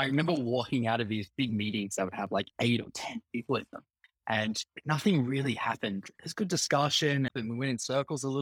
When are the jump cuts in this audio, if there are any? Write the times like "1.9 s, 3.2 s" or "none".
7.3 s